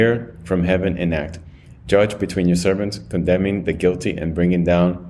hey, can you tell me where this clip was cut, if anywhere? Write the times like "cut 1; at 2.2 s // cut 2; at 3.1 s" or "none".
none